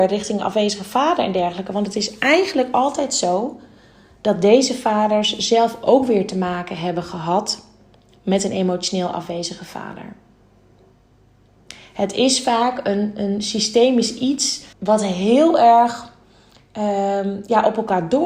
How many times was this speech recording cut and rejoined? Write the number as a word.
one